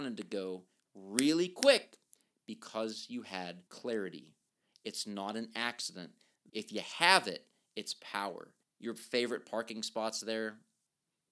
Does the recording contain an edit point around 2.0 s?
no; 3 cuts; at 3.7 s, 6.5 s, 8.6 s

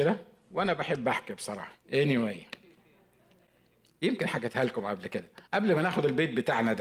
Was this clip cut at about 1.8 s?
yes; 2 cuts; at 1.8 s, 5.5 s

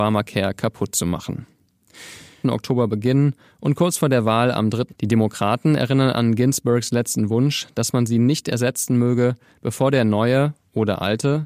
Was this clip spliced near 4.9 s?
yes; 2 cuts; at 2.4 s, 4.9 s

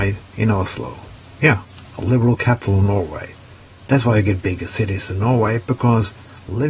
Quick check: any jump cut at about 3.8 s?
yes; 2 cuts; at 1.9 s, 3.8 s

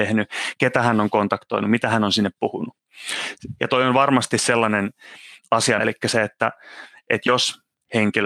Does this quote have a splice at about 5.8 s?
yes; 2 cuts; at 3.6 s, 5.8 s

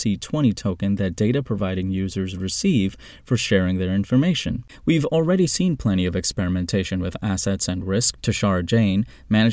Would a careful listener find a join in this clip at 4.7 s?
yes; 2 cuts; at 4.7 s, 8.2 s

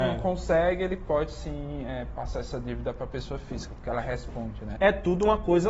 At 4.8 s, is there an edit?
yes; 1 cut; at 4.8 s

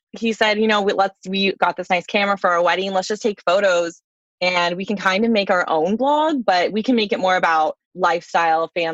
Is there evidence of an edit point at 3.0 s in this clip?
no; 1 cut; at 7.8 s

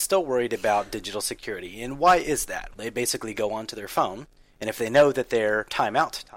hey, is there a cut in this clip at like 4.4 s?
no; 1 cut; at 2.7 s

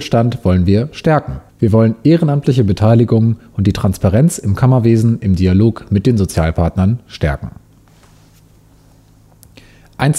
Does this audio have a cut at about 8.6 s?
no; 1 cut; at 1.5 s

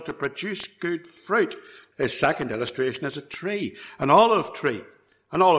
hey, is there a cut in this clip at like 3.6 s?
no; 1 cut; at 1.9 s

